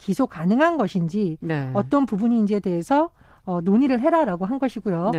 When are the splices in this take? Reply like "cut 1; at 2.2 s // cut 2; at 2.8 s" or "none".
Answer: none